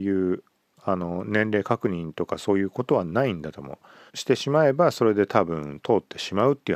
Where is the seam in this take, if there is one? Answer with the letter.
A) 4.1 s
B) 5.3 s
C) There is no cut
A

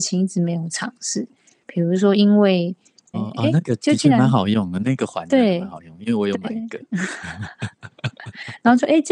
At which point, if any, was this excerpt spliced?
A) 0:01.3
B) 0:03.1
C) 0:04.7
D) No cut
B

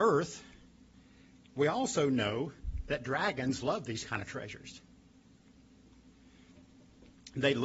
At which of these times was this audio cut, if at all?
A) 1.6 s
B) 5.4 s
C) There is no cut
C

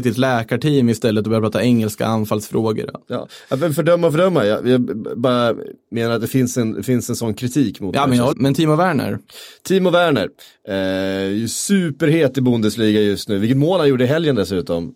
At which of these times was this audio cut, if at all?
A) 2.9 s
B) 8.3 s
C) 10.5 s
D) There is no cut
B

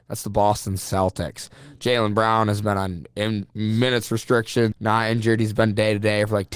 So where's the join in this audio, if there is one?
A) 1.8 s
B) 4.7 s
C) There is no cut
B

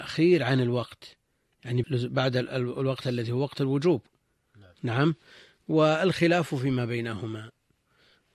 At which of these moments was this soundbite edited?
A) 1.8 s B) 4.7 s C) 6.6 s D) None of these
A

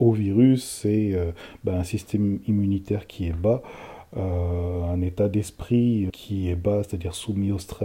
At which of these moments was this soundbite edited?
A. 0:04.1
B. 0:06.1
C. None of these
B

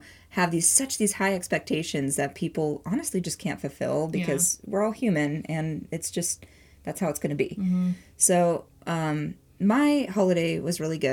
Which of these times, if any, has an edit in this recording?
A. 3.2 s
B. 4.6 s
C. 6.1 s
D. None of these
D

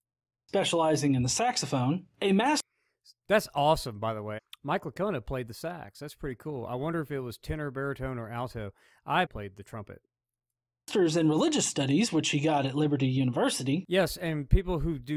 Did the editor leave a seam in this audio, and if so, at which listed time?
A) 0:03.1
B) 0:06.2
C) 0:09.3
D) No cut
C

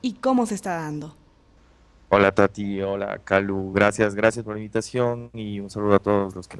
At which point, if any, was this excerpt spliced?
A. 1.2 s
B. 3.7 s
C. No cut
C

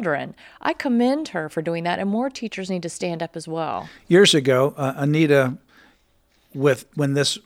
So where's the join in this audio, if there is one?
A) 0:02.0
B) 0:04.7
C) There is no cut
C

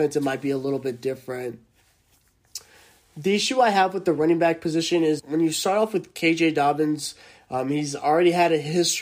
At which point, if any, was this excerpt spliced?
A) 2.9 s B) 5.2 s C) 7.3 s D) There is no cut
B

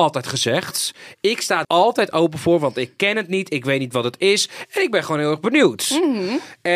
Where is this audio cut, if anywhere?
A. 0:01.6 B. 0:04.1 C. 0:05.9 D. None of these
A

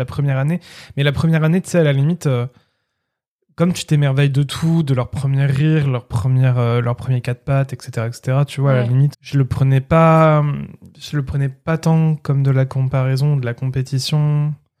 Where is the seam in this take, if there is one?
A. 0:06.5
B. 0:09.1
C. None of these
B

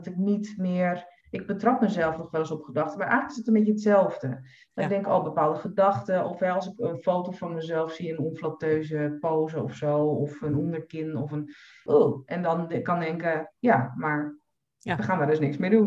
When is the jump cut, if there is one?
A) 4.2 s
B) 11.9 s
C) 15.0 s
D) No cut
B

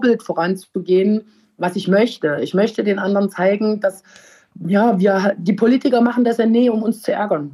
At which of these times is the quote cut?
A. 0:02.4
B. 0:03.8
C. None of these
C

